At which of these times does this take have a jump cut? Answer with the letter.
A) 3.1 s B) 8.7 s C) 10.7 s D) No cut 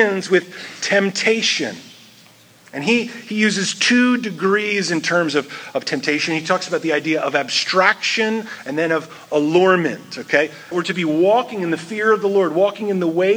C